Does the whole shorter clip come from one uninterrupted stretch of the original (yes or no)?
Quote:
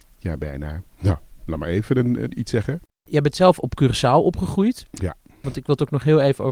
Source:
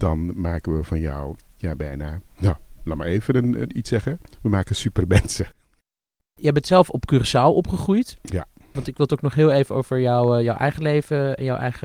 no